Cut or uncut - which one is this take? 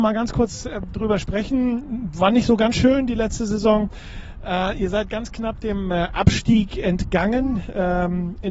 uncut